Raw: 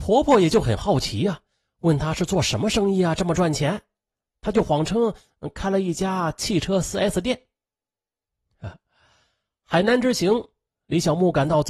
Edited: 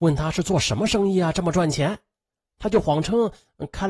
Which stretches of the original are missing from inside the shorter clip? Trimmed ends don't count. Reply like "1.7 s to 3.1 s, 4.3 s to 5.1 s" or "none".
none